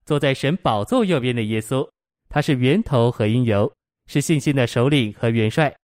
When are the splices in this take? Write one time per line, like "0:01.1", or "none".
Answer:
0:02.1
0:04.0